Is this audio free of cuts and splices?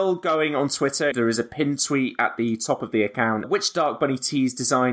no; 2 cuts; at 1.1 s, 3.4 s

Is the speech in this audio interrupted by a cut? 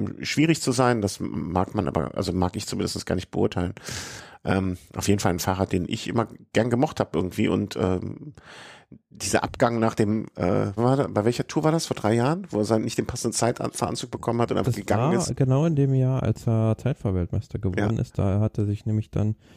yes; 1 cut; at 10.8 s

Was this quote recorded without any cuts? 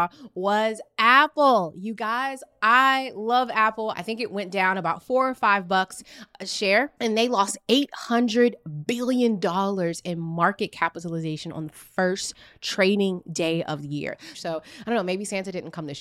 no; 2 cuts; at 3.9 s, 14.3 s

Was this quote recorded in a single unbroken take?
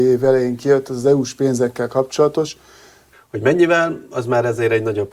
no; 1 cut; at 3.1 s

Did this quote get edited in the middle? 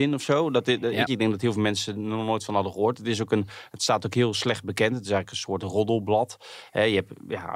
yes; 1 cut; at 1.1 s

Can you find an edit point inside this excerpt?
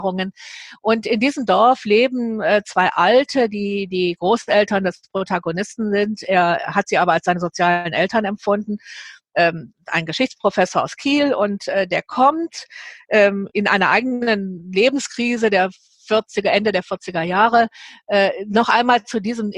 no; 0 cuts

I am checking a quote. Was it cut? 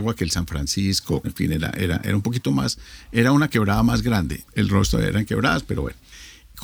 yes; 2 cuts; at 1.2 s, 4.5 s

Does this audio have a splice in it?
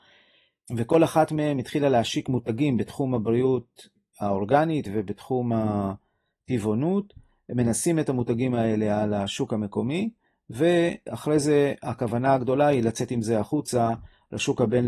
no; 0 cuts

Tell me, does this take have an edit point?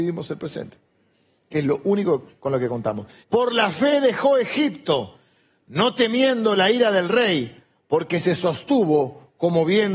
yes; 1 cut; at 3.2 s

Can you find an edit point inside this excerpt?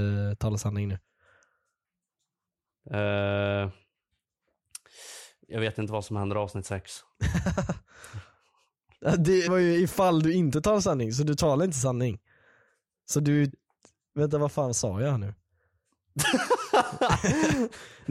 yes; 1 cut; at 9.5 s

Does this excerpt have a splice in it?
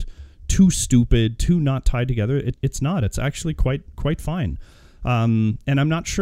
yes; 1 cut; at 2.5 s

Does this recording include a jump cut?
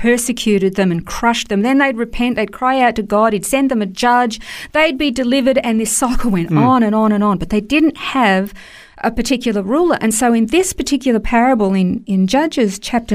no; 0 cuts

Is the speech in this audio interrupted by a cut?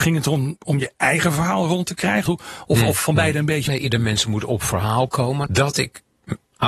yes; 3 cuts; at 2.3 s, 3.7 s, 5.5 s

